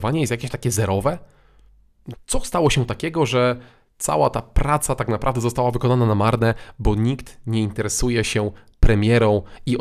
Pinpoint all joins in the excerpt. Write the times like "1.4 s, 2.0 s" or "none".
2.1 s